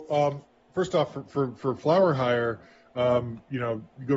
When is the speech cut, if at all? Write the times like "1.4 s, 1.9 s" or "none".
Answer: none